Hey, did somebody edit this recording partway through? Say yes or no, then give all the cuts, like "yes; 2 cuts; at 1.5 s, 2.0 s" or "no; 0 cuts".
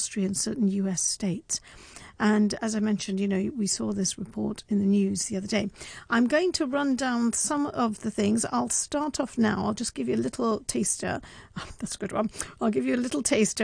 no; 0 cuts